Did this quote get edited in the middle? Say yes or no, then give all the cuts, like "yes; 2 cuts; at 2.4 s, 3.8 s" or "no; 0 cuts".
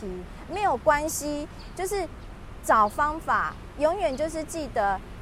no; 0 cuts